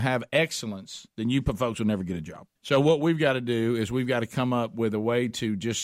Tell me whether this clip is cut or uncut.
cut